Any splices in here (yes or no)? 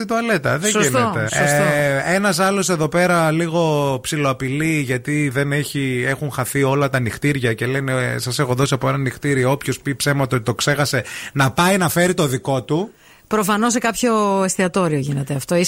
yes